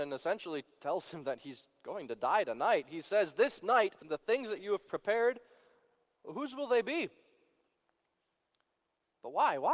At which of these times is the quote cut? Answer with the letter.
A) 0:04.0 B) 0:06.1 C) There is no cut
A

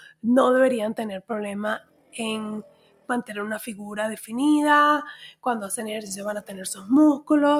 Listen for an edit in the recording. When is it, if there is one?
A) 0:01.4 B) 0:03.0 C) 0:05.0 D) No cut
D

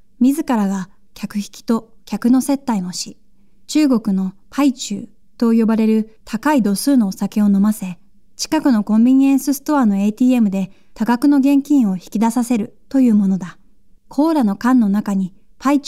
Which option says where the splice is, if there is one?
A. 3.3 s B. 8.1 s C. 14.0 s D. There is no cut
C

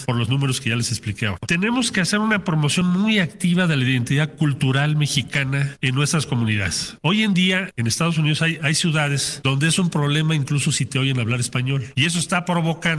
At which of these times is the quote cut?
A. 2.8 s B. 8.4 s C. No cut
C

